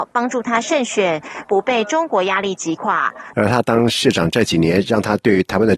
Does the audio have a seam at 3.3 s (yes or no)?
yes